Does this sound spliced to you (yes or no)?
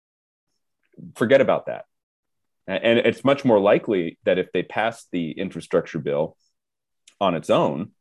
yes